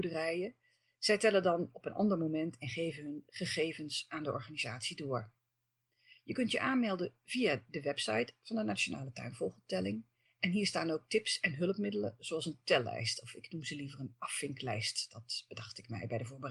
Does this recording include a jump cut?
no; 0 cuts

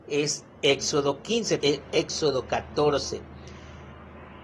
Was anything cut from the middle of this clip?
yes; 1 cut; at 1.6 s

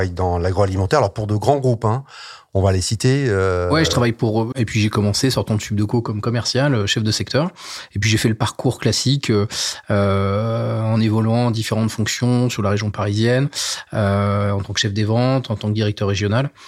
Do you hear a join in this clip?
yes; 1 cut; at 4.5 s

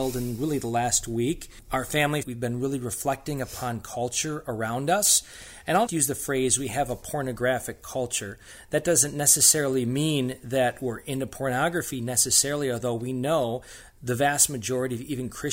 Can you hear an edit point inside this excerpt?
yes; 2 cuts; at 2.2 s, 5.9 s

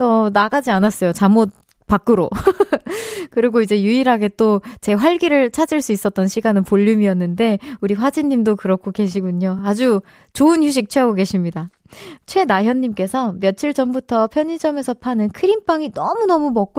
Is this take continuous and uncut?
yes; 0 cuts

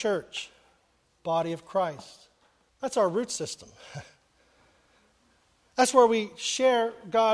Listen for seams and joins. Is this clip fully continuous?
no; 1 cut; at 2.7 s

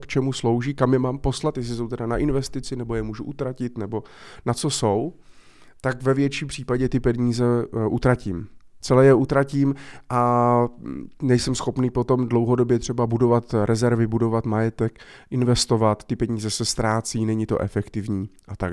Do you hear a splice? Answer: no; 0 cuts

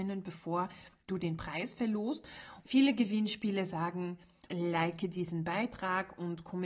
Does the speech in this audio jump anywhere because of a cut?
yes; 2 cuts; at 2.7 s, 4.5 s

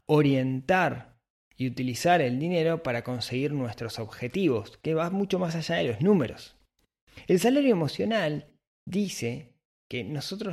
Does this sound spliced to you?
no; 0 cuts

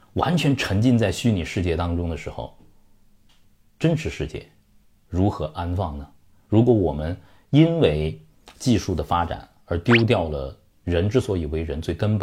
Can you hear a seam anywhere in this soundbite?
no; 0 cuts

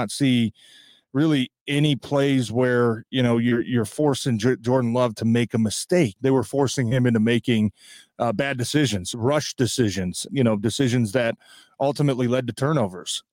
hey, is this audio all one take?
no; 2 cuts; at 6.2 s, 10.3 s

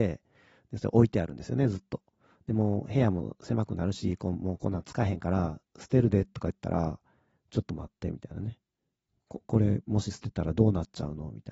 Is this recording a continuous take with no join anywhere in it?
yes; 0 cuts

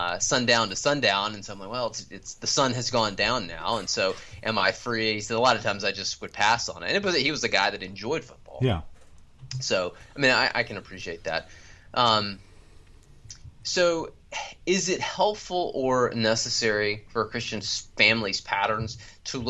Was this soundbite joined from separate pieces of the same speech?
no; 0 cuts

